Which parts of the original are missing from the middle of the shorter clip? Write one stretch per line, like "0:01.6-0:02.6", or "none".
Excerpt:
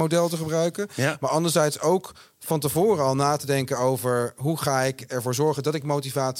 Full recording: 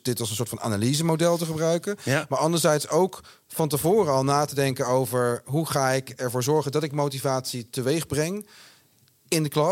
none